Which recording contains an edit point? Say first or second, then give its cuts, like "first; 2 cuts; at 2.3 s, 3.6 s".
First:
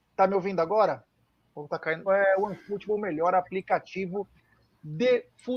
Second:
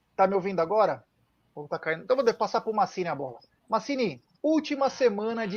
first; 1 cut; at 2.1 s